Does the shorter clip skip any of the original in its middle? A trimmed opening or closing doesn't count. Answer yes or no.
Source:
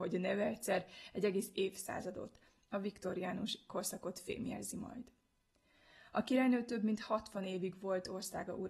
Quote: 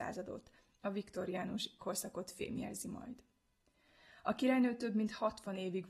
no